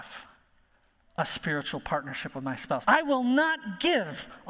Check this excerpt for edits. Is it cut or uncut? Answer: cut